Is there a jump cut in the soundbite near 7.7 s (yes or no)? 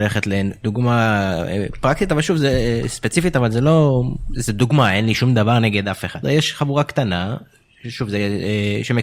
no